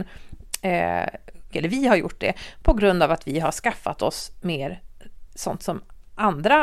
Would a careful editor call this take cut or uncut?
cut